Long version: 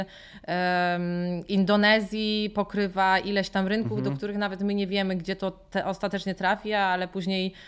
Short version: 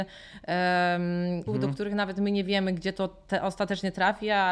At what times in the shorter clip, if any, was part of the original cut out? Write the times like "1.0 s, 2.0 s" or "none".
1.5 s